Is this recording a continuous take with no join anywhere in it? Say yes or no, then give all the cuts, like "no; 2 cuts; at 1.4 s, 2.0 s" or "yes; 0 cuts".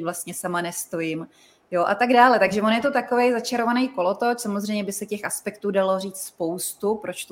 yes; 0 cuts